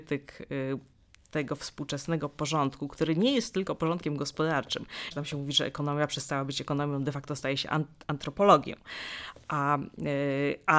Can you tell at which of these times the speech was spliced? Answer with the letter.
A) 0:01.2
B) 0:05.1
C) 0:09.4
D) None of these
B